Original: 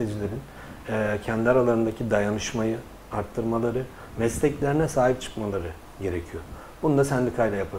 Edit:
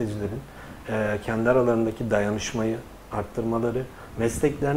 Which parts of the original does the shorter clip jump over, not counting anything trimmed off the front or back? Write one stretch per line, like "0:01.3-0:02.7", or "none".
none

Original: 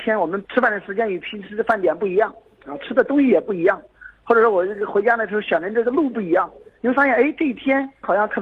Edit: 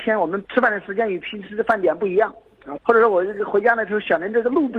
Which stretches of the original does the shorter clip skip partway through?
0:02.8-0:04.2

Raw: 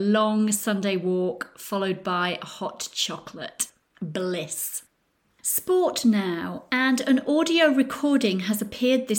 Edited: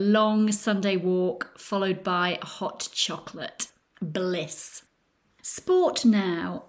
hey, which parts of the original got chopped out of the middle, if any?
none

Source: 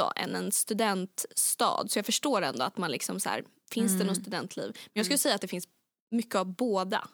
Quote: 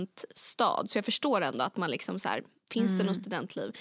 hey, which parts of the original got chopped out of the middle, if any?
none

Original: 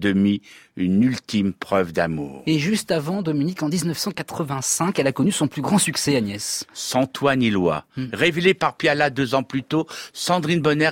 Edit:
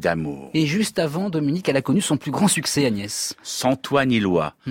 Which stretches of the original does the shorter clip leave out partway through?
0:03.6-0:04.9

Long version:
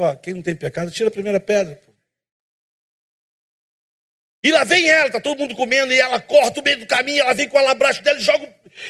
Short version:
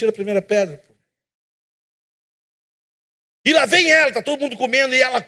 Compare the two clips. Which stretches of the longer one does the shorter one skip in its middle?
none

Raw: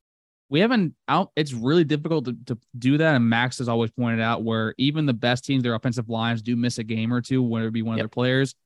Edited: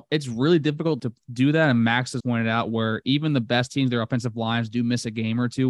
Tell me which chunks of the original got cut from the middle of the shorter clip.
0:02.2-0:02.4
0:03.7-0:03.9

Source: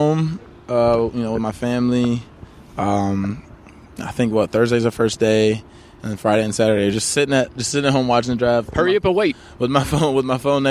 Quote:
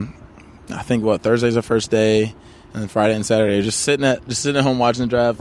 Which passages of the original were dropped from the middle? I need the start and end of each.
none

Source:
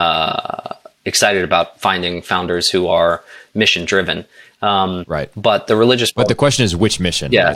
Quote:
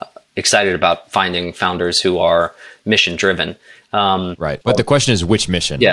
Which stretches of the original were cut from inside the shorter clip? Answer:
0:05.3-0:06.1

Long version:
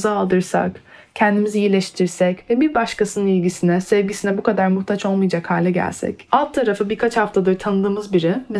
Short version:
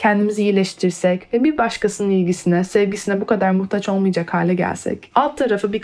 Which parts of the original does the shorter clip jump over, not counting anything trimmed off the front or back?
none

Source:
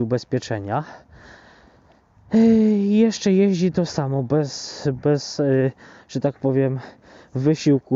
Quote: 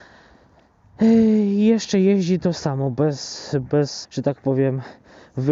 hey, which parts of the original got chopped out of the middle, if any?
0:05.4-0:06.0

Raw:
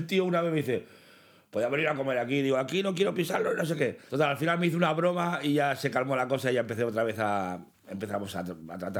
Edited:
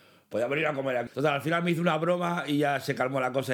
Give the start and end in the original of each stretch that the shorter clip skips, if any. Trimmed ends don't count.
0:02.3-0:04.0

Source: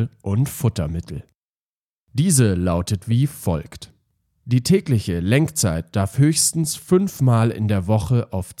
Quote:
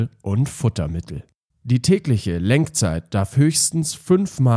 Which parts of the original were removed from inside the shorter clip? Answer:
0:01.5-0:04.3

